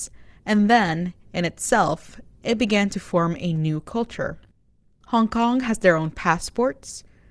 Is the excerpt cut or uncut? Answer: uncut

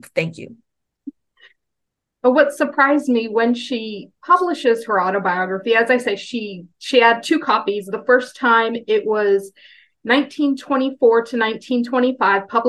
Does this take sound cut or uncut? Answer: uncut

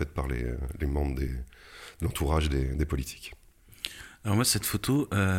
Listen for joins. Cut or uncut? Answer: uncut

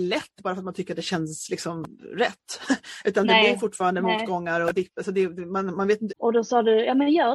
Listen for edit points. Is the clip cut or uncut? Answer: cut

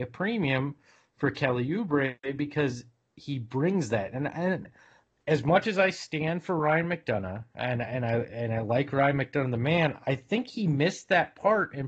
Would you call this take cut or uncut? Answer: uncut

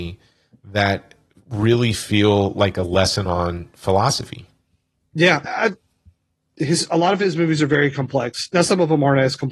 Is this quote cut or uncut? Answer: cut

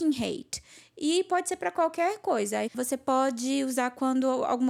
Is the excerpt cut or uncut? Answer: cut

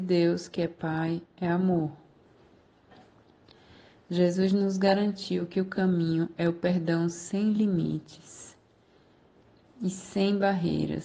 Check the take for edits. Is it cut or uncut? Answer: uncut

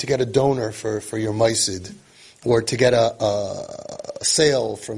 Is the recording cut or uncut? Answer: uncut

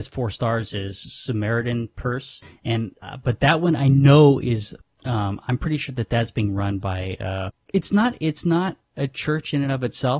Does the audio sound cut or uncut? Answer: uncut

